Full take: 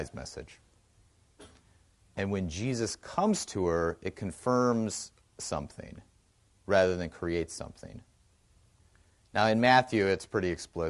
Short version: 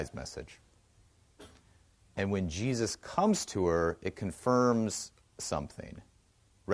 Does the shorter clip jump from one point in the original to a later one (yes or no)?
no